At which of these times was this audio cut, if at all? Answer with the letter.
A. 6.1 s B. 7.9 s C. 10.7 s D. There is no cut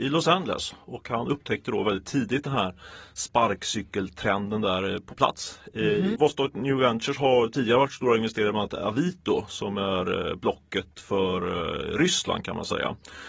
A